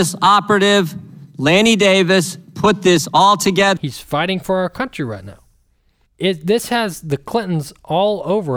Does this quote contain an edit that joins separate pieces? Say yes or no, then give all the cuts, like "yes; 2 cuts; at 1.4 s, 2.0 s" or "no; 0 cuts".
yes; 2 cuts; at 3.8 s, 6.1 s